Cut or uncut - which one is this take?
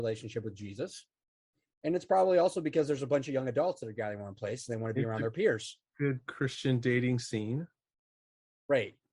uncut